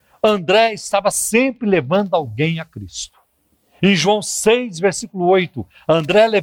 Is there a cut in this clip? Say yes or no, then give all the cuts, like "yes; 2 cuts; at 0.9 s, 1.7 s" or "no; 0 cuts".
yes; 1 cut; at 3.8 s